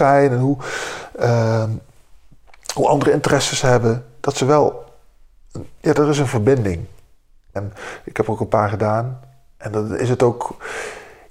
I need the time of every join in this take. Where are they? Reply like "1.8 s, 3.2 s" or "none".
7.6 s

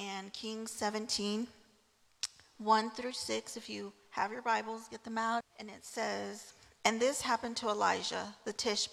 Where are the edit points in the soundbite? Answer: 5.4 s

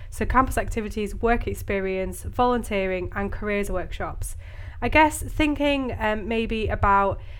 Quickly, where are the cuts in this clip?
none

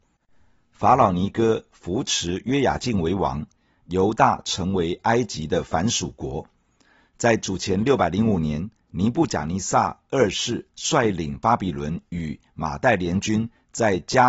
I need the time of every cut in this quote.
none

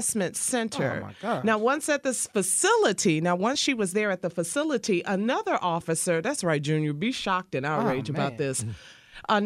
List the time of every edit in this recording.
none

